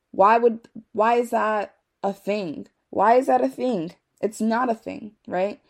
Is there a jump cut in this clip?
no; 0 cuts

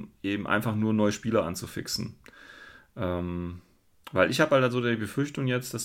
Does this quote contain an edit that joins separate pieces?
no; 0 cuts

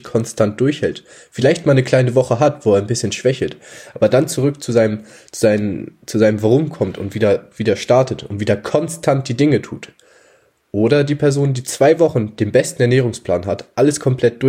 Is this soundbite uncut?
yes; 0 cuts

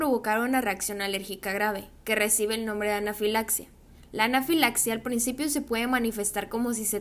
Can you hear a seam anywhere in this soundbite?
no; 0 cuts

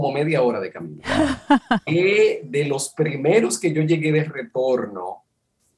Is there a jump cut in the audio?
yes; 1 cut; at 1.9 s

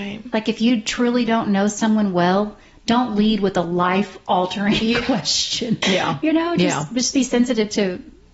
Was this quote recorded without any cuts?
no; 1 cut; at 5.8 s

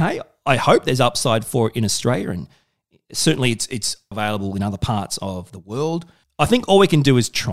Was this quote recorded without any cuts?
no; 1 cut; at 4.1 s

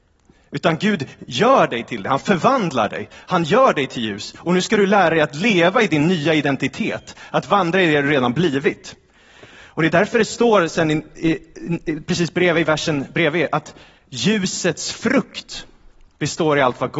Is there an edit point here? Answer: no; 0 cuts

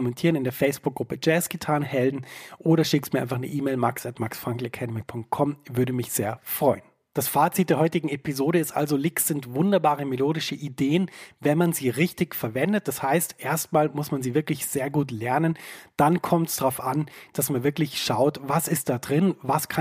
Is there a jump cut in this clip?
no; 0 cuts

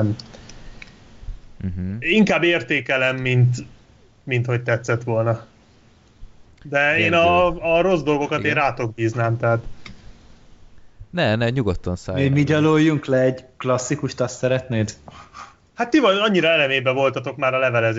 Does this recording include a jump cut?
yes; 1 cut; at 6.5 s

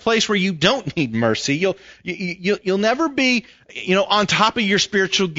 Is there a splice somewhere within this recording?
no; 0 cuts

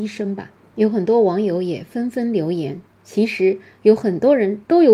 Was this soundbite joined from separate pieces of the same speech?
no; 0 cuts

